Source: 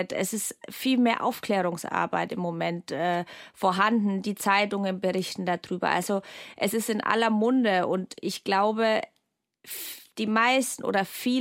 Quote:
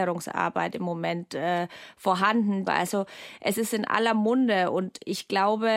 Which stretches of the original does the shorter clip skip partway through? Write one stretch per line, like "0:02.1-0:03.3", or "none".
0:04.2-0:05.8